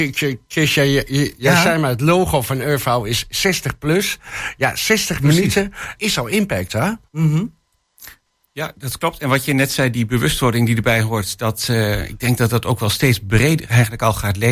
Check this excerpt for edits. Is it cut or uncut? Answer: cut